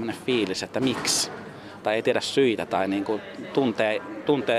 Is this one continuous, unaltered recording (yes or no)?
yes